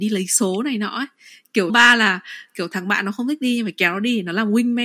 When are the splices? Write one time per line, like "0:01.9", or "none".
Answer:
0:01.7